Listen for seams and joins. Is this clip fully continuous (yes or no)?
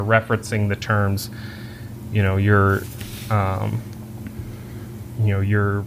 yes